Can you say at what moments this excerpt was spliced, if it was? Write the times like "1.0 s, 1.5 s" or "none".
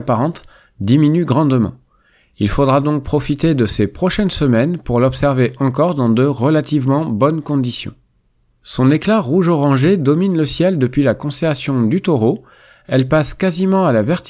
none